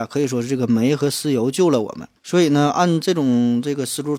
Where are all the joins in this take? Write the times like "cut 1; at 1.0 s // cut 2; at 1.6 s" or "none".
cut 1; at 2.2 s